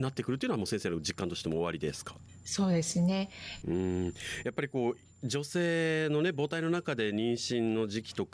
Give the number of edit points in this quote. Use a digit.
1